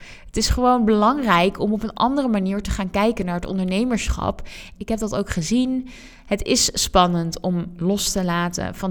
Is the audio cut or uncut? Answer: cut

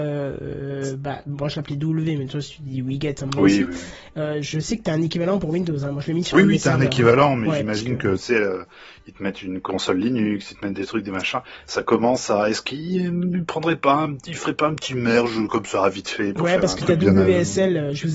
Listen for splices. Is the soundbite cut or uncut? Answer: uncut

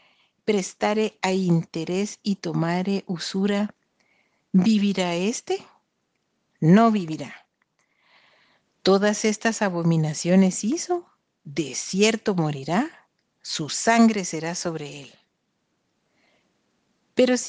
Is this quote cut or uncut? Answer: uncut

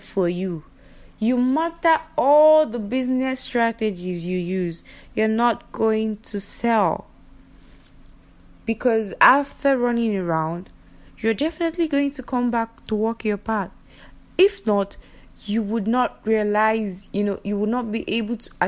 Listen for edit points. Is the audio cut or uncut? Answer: uncut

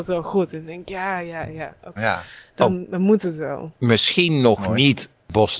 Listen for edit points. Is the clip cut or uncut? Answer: cut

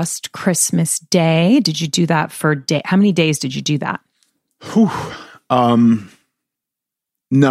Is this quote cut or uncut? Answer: uncut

